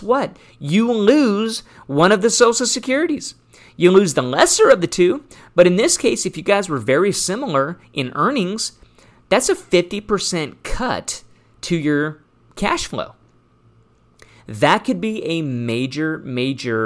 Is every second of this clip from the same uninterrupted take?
yes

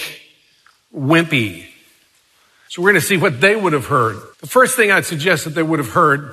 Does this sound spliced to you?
yes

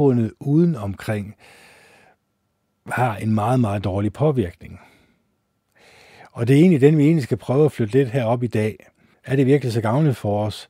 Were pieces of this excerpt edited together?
yes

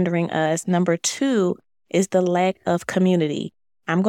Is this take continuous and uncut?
yes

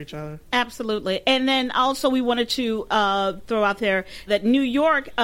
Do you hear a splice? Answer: yes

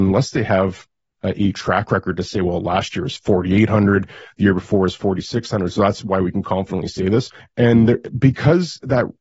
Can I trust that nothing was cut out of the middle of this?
no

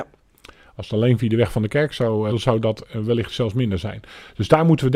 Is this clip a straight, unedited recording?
no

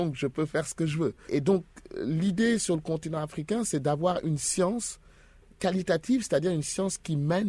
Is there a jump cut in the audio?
no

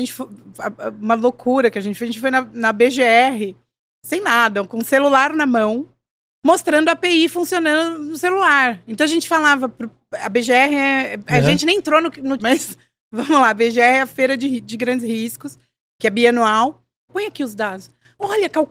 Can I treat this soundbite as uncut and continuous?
no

